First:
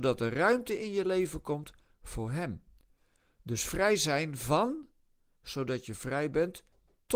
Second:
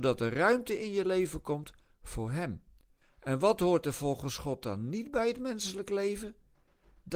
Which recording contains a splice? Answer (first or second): second